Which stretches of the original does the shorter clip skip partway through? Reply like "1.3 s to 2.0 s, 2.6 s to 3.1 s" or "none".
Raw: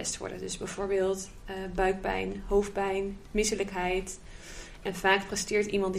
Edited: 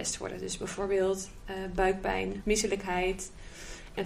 2.4 s to 3.3 s